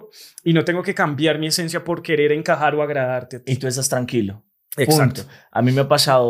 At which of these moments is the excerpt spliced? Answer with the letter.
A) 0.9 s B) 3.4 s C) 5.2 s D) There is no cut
D